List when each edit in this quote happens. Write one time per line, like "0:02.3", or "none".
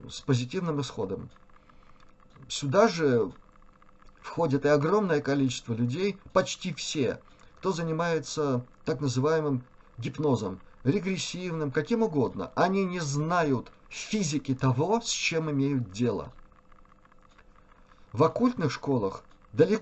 none